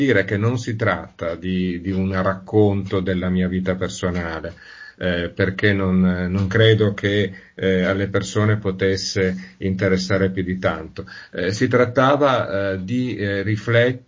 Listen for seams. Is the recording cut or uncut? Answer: uncut